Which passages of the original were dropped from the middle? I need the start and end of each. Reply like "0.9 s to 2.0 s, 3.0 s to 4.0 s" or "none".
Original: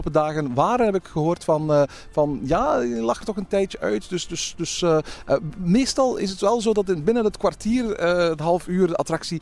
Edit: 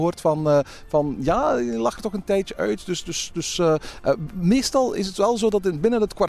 none